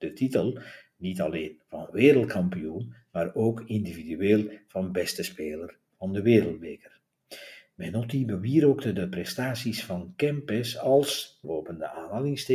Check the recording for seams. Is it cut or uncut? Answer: cut